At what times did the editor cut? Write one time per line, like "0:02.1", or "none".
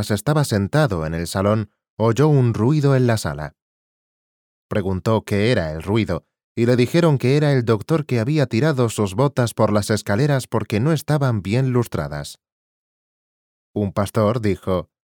none